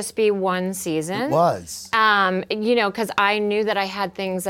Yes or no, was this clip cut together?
no